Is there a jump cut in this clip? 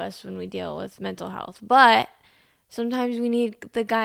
no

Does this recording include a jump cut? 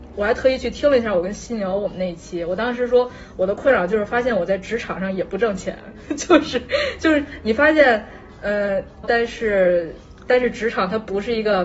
yes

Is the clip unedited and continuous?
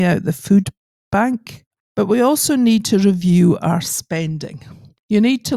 no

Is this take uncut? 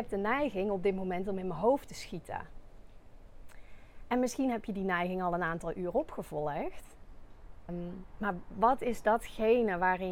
no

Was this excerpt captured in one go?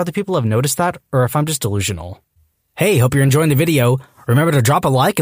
yes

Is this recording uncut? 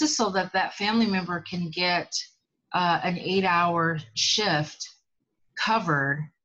yes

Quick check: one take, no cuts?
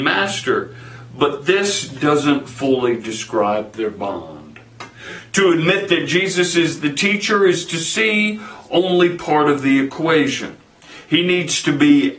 yes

